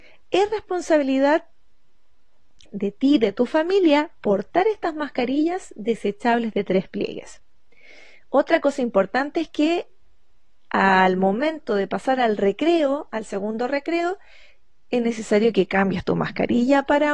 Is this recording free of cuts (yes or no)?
no